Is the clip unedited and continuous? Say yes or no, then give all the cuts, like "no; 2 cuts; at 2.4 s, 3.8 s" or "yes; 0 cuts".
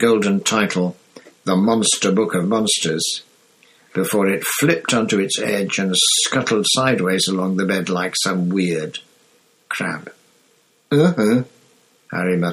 yes; 0 cuts